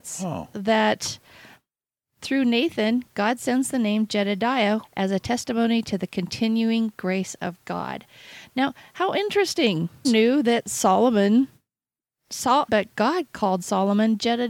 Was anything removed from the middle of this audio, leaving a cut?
yes; 3 cuts; at 4.8 s, 10.0 s, 12.7 s

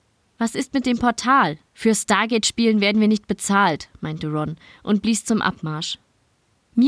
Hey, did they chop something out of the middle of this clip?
yes; 1 cut; at 1.7 s

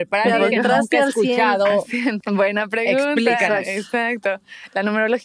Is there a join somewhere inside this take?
yes; 1 cut; at 2.2 s

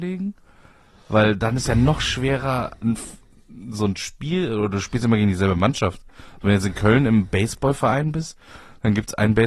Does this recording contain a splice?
no; 0 cuts

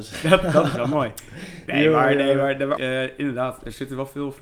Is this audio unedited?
no; 1 cut; at 2.8 s

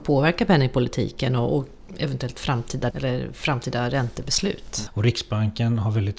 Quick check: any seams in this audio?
yes; 2 cuts; at 2.9 s, 4.9 s

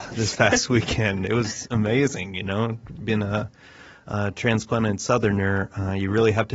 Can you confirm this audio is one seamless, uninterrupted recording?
yes; 0 cuts

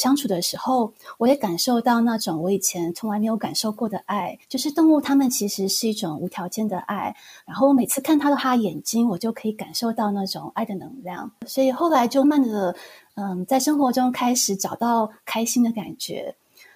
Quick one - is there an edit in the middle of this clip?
yes; 2 cuts; at 4.4 s, 12.2 s

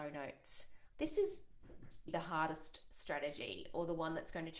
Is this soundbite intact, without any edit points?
no; 2 cuts; at 0.9 s, 2.1 s

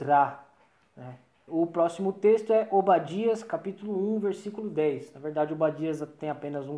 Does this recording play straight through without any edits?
no; 1 cut; at 1.5 s

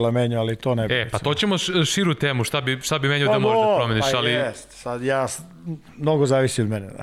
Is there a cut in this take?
no; 0 cuts

